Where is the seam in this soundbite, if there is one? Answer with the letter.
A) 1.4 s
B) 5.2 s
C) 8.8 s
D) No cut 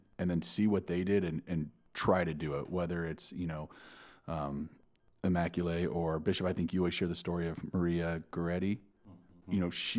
D